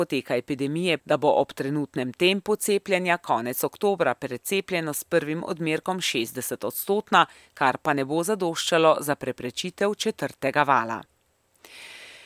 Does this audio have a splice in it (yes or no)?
yes